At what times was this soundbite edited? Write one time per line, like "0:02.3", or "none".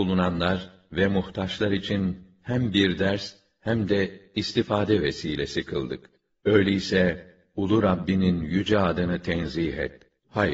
none